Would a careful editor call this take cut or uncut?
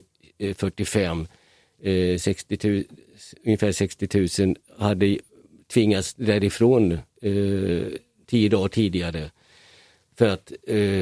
uncut